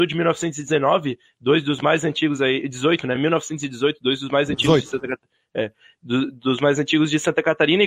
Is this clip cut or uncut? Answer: uncut